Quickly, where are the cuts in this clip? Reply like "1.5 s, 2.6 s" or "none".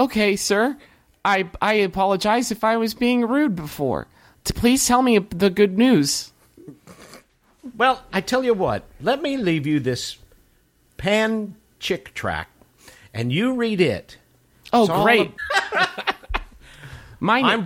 15.4 s